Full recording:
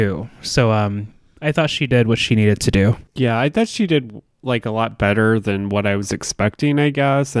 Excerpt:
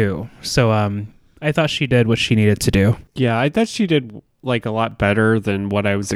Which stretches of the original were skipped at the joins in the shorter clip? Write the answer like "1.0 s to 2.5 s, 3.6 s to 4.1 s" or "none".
none